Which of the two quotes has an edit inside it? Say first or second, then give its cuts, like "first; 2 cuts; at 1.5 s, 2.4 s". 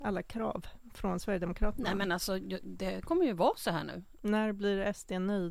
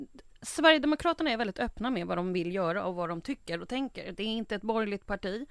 first; 1 cut; at 4.2 s